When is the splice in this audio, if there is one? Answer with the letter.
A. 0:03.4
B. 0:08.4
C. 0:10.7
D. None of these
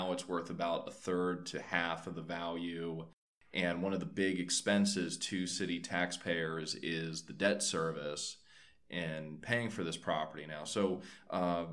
D